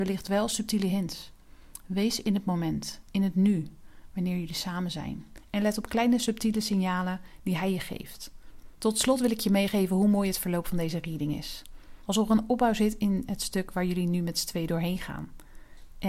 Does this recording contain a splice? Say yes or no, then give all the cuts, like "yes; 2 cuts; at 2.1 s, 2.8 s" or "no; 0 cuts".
yes; 2 cuts; at 8.8 s, 12.1 s